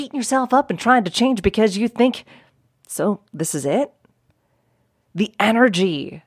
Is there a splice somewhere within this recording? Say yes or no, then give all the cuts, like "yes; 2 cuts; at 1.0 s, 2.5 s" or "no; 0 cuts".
no; 0 cuts